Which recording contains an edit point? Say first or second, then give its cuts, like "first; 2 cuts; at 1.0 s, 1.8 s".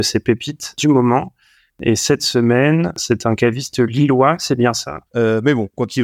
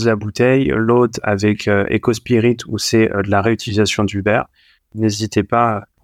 first; 1 cut; at 5.1 s